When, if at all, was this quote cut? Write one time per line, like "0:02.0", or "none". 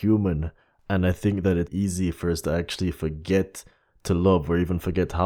0:01.7